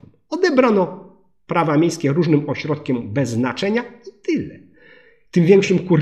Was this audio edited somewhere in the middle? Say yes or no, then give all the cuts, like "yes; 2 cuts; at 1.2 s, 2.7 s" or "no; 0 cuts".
no; 0 cuts